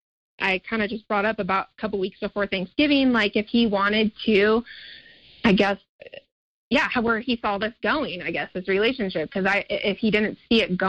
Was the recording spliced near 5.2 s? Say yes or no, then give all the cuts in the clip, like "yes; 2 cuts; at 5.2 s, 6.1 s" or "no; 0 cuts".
yes; 1 cut; at 5.2 s